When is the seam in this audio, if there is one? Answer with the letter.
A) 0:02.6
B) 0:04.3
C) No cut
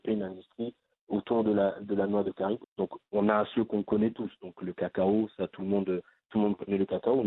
A